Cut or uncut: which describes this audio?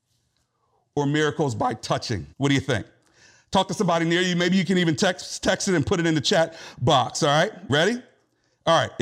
cut